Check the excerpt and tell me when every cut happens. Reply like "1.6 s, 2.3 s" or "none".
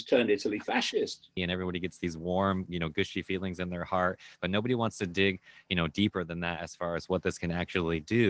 1.4 s